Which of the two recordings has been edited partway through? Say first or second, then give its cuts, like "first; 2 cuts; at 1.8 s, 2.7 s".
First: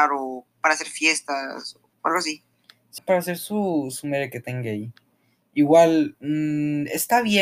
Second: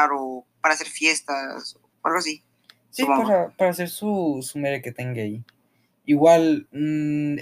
first; 1 cut; at 3.0 s